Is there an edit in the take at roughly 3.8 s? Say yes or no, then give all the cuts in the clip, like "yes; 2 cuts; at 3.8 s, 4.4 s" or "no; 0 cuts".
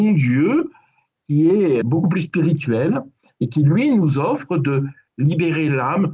no; 1 cut; at 1.8 s